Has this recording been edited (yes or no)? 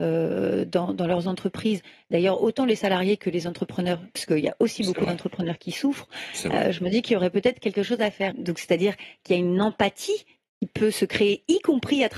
yes